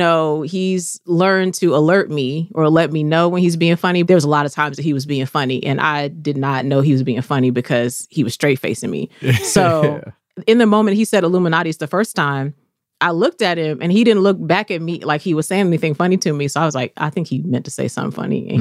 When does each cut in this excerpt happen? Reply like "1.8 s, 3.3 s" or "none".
4.0 s